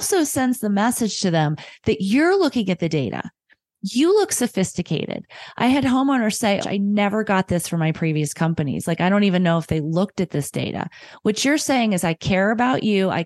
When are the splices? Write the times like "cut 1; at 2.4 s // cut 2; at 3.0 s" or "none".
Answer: cut 1; at 6.6 s